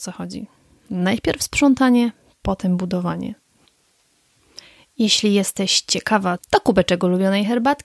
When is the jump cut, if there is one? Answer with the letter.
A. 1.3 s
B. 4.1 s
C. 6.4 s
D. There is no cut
C